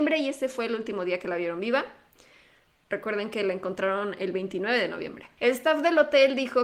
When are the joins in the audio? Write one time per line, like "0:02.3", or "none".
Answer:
0:05.4